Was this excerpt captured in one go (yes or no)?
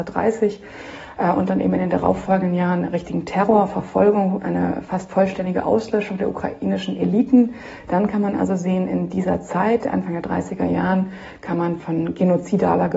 yes